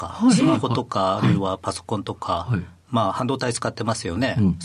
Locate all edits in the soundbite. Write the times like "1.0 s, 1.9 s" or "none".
none